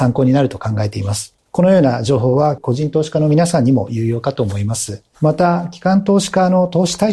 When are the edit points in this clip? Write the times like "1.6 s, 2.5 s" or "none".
1.4 s, 2.6 s